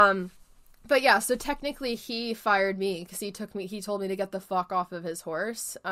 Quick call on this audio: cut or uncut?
uncut